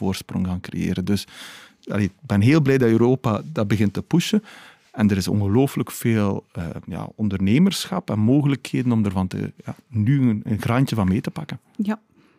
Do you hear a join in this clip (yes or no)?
no